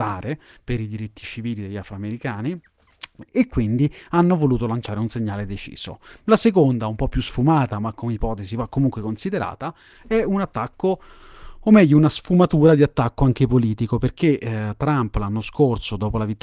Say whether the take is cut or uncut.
cut